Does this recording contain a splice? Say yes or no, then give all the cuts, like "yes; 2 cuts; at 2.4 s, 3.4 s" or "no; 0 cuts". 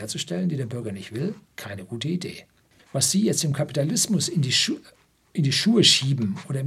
yes; 2 cuts; at 1.4 s, 2.8 s